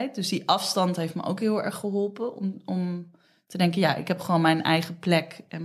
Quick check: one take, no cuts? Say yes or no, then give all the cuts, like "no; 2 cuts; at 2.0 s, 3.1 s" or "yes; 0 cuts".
yes; 0 cuts